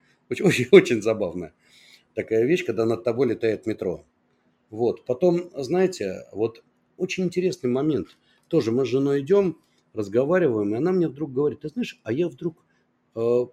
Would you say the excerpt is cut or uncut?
uncut